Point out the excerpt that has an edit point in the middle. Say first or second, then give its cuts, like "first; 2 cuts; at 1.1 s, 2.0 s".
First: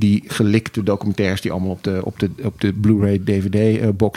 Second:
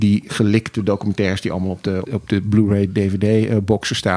second; 1 cut; at 2.0 s